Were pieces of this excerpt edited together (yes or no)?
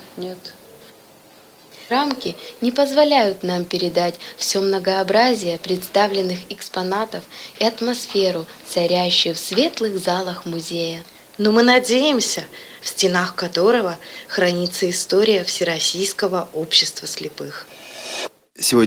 yes